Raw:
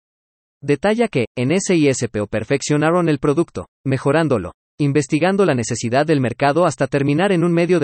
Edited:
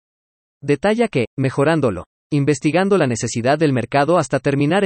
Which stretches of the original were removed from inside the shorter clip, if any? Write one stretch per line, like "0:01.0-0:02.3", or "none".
0:01.3-0:03.7